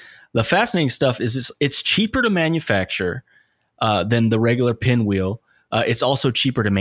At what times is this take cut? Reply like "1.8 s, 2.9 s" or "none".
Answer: none